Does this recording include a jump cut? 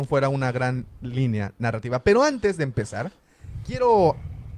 no; 0 cuts

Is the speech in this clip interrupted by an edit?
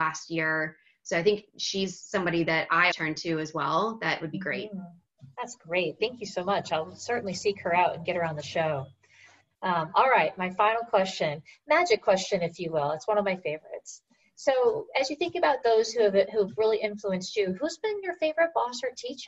yes; 1 cut; at 2.9 s

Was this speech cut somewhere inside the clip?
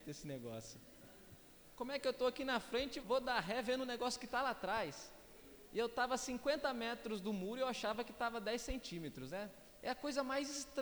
yes; 2 cuts; at 3.0 s, 9.8 s

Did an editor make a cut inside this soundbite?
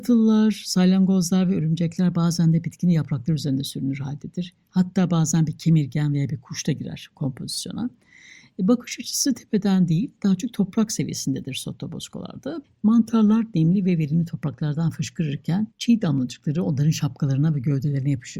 yes; 2 cuts; at 12.6 s, 15.7 s

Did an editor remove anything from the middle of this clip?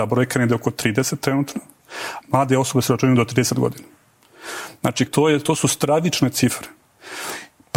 yes; 2 cuts; at 2.2 s, 5.1 s

